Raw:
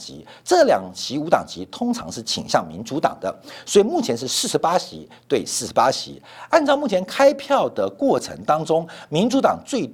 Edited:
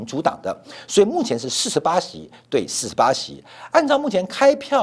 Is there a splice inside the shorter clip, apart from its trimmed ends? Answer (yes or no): no